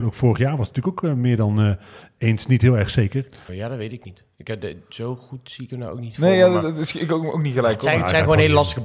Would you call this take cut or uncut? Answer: cut